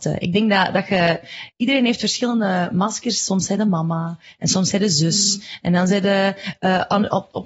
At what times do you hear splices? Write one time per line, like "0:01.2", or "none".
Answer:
none